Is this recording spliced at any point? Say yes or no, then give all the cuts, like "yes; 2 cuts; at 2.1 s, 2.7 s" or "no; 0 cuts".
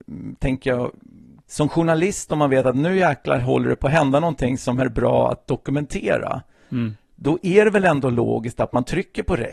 no; 0 cuts